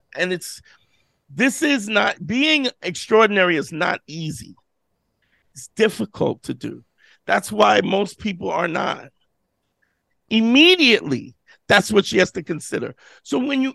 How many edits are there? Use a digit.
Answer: 1